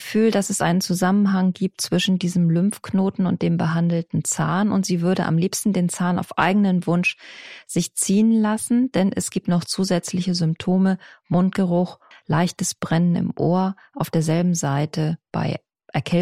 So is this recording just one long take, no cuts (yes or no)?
no